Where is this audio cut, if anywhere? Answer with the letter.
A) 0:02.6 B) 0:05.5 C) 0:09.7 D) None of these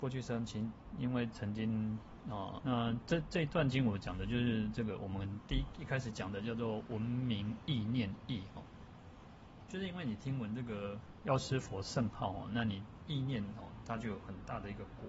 A